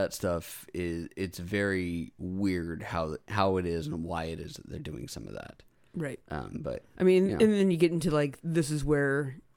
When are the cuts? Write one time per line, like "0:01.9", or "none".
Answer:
none